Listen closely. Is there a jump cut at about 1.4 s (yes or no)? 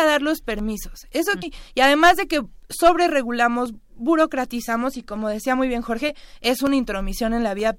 yes